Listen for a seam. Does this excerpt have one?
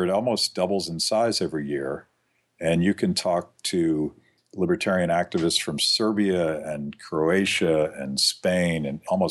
no; 0 cuts

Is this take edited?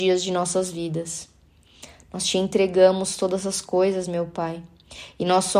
no; 0 cuts

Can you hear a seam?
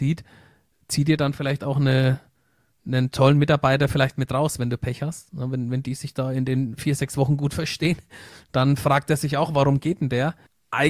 no; 0 cuts

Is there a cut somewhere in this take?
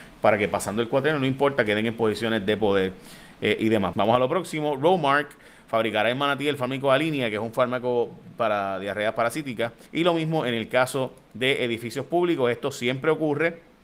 yes; 2 cuts; at 3.9 s, 9.9 s

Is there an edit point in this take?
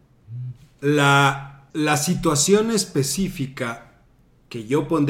yes; 1 cut; at 1.7 s

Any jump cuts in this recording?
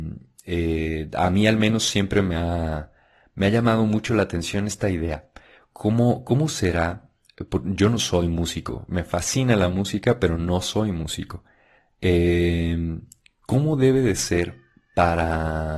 no; 0 cuts

